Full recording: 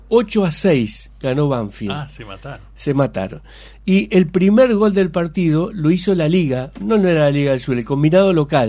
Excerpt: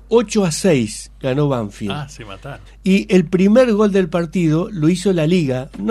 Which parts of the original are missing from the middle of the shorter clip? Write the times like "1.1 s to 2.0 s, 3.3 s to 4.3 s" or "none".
2.7 s to 3.7 s